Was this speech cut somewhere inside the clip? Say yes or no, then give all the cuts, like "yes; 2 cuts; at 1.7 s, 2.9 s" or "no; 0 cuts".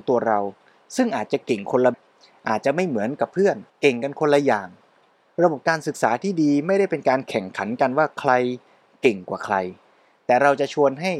yes; 2 cuts; at 1.9 s, 3.7 s